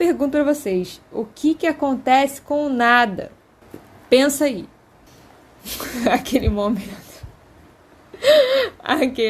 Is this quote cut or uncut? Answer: uncut